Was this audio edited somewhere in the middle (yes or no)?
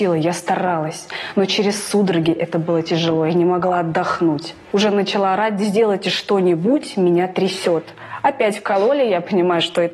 no